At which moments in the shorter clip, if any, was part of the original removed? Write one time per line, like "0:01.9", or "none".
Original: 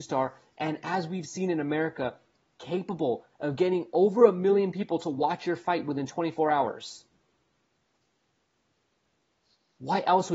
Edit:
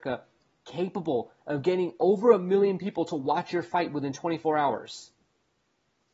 none